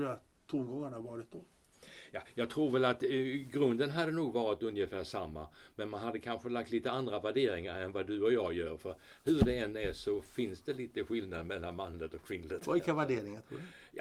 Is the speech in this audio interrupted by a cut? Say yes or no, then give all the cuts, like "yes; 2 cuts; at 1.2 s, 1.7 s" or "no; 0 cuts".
no; 0 cuts